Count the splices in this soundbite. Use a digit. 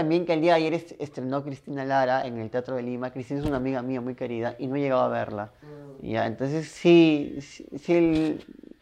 0